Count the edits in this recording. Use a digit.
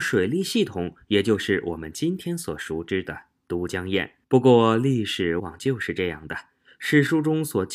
2